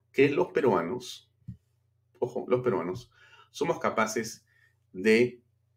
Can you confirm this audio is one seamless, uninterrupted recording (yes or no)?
yes